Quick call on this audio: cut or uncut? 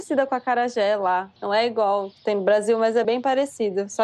cut